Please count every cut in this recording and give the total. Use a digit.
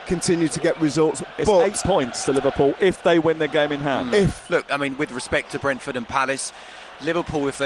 1